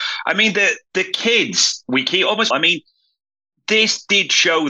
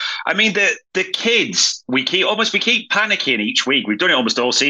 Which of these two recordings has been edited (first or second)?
first